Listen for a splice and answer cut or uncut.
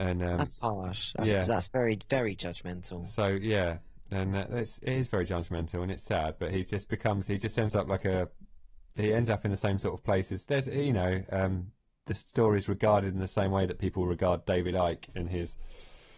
uncut